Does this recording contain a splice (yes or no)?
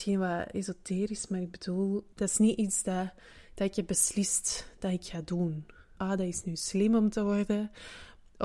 yes